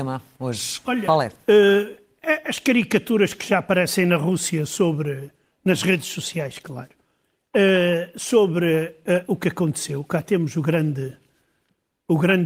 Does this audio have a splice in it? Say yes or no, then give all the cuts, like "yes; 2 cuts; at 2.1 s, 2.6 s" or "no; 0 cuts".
no; 0 cuts